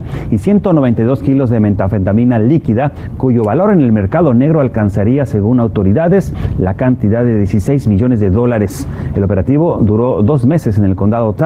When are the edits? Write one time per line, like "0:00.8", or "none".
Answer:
none